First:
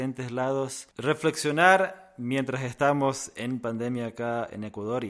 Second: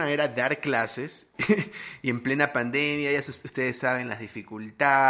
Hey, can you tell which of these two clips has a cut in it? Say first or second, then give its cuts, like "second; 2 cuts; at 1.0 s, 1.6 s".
first; 1 cut; at 0.9 s